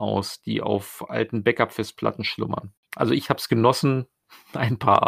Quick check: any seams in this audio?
yes; 1 cut; at 2.9 s

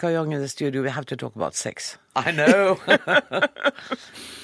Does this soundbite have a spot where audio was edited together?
yes; 1 cut; at 2.1 s

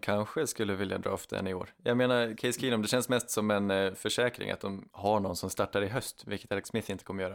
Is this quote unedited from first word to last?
yes; 0 cuts

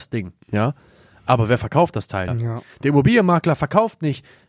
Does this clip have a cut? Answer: yes; 1 cut; at 2.3 s

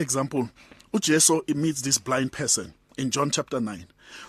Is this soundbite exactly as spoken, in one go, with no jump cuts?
yes; 0 cuts

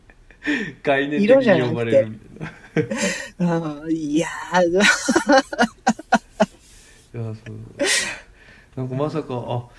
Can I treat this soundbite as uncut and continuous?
yes; 0 cuts

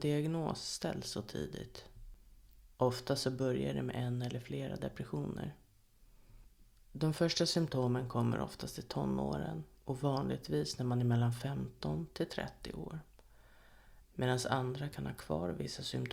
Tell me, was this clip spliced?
yes; 3 cuts; at 2.7 s, 6.8 s, 14.0 s

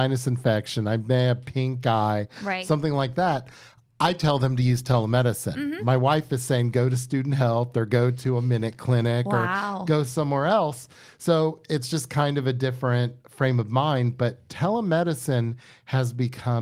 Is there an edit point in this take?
no; 0 cuts

